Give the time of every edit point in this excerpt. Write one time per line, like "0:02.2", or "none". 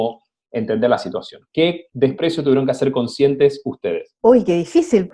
none